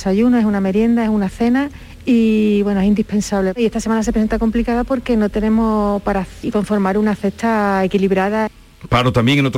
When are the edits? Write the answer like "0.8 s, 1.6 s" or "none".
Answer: 6.4 s